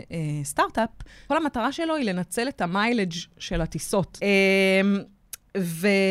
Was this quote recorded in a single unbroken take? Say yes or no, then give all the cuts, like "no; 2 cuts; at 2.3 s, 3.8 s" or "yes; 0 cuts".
no; 2 cuts; at 1.3 s, 4.2 s